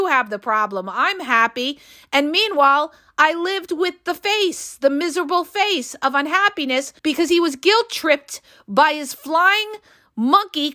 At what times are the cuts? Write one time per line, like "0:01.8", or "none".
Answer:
0:07.0